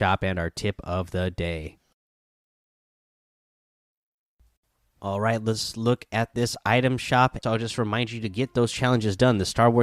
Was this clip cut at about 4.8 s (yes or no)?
no